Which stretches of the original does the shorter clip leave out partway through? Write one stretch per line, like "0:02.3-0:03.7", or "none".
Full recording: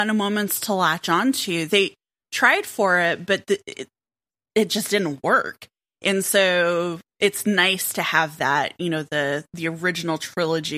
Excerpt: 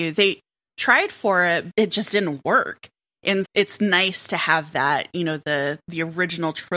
0:03.3-0:04.5
0:06.2-0:07.1